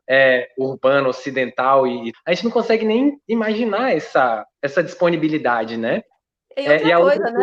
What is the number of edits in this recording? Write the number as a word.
two